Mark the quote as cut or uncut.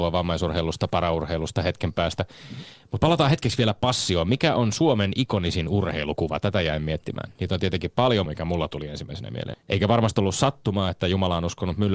cut